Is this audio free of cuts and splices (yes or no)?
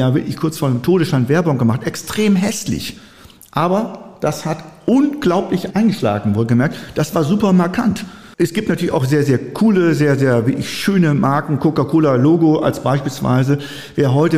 yes